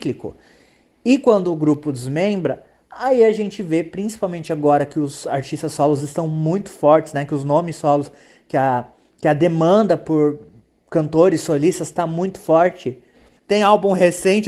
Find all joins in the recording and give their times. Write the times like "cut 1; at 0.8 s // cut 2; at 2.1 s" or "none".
cut 1; at 13.4 s